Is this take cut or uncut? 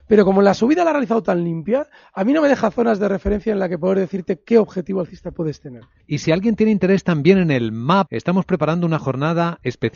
cut